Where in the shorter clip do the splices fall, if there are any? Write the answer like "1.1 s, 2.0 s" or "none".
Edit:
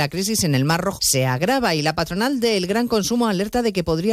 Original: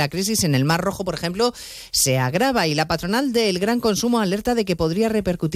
1.0 s